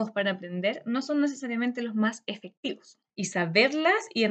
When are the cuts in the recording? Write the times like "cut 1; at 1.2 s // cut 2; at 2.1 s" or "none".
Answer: cut 1; at 3.1 s